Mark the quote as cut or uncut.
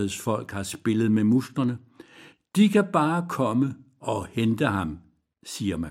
uncut